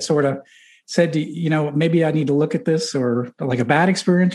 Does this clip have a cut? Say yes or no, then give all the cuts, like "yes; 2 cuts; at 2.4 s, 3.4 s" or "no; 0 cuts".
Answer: no; 0 cuts